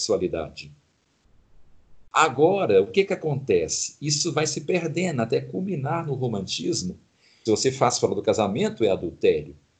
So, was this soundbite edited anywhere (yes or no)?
yes